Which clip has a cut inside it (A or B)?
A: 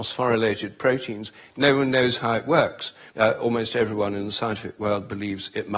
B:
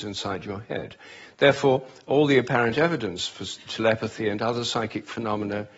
A